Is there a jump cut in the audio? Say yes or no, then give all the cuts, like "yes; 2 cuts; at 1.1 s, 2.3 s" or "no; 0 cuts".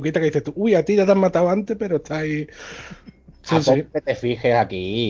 no; 0 cuts